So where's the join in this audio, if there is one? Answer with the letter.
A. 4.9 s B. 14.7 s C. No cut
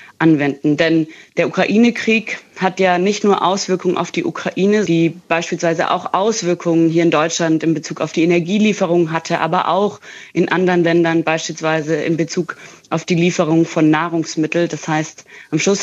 A